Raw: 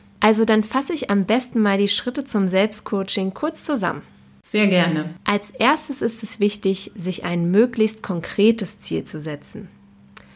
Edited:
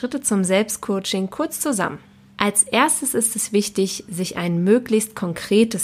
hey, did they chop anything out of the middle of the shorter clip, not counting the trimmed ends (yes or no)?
yes